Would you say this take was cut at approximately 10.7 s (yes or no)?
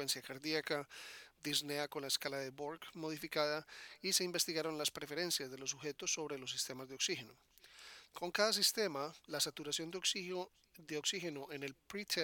no